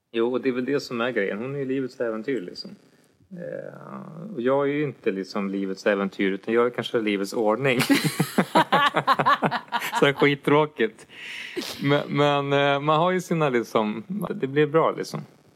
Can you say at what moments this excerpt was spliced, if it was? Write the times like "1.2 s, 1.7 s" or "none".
14.3 s